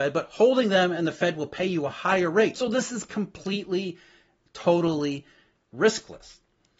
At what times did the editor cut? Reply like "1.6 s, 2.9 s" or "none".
2.5 s